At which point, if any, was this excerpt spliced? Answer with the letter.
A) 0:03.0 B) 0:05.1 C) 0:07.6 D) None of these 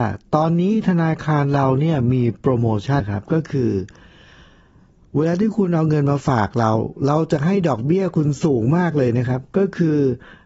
A